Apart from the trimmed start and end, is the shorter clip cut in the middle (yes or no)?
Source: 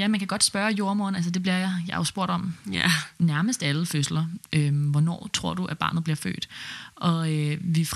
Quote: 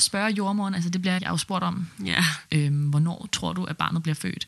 yes